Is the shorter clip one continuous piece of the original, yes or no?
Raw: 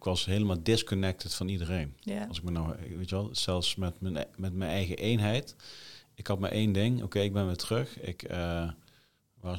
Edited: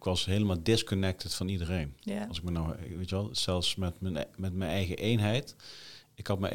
yes